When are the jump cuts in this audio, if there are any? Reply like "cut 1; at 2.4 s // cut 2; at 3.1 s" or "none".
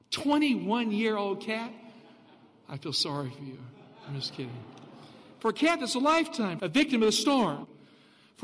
cut 1; at 6.6 s